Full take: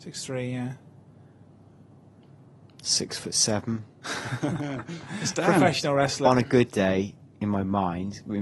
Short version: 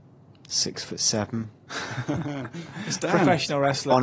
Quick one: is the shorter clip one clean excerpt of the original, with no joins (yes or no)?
yes